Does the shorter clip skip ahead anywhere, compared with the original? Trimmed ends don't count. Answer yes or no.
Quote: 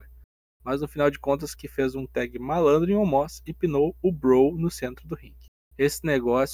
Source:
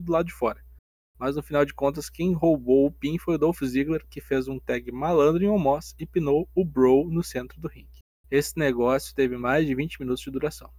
yes